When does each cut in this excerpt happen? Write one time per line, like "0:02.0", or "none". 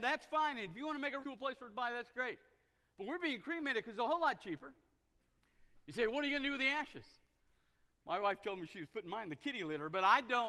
0:01.2

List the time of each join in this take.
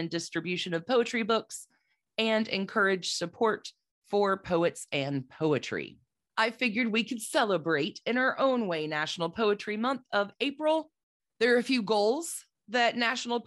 0:06.3
0:11.2

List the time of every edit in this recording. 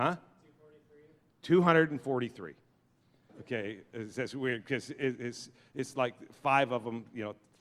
0:03.3

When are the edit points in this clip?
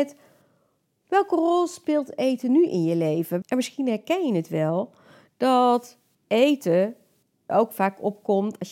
0:03.4
0:07.5

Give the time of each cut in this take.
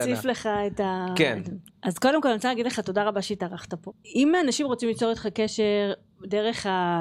0:01.7
0:03.9

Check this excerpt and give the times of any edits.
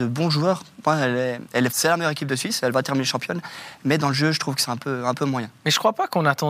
0:01.7

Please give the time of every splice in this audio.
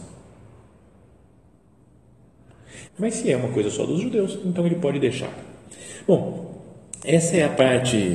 0:02.9

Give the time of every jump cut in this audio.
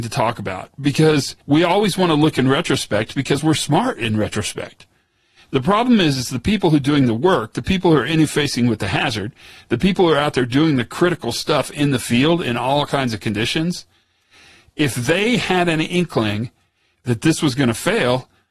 0:01.4

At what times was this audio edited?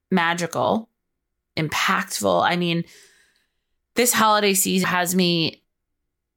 0:04.8

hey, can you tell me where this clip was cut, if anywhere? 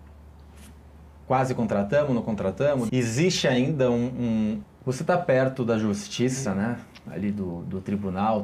0:02.9
0:04.6

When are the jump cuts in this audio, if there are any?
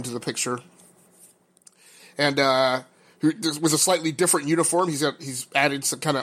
none

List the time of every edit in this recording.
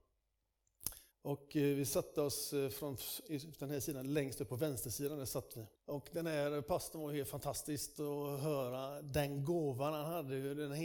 0:01.1
0:05.7

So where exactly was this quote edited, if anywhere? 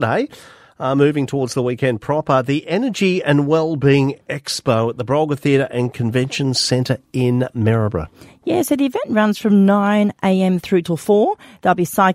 none

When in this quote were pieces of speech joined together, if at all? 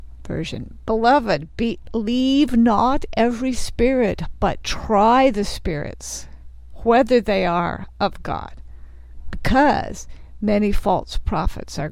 none

